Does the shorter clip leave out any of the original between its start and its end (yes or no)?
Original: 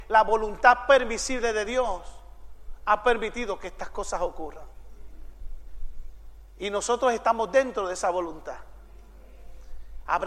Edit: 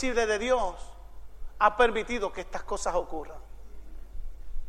no